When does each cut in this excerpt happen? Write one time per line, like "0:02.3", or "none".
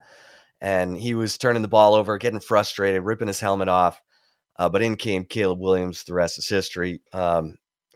0:07.1